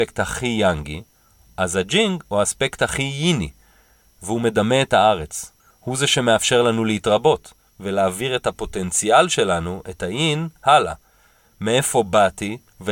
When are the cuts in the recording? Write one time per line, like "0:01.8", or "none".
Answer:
0:05.7